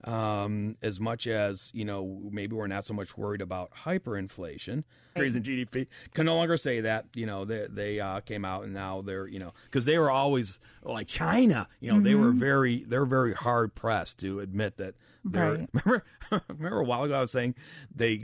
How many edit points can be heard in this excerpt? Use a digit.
2